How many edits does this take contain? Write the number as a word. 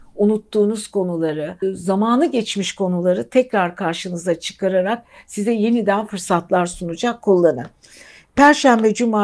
one